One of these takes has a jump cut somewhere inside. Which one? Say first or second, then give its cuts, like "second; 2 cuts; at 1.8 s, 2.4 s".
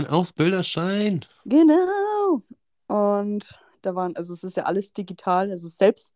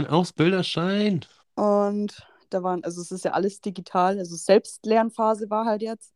second; 1 cut; at 1.4 s